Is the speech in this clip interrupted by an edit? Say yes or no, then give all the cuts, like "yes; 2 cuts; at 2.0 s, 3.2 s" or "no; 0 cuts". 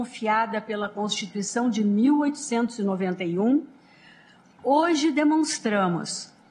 no; 0 cuts